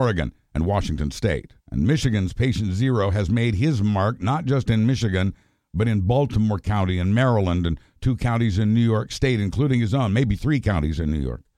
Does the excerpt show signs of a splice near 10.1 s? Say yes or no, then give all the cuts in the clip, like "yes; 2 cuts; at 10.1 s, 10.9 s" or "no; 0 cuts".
no; 1 cut; at 1.6 s